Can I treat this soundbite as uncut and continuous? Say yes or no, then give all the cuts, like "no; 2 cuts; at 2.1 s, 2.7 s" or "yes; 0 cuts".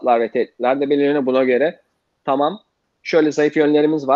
yes; 0 cuts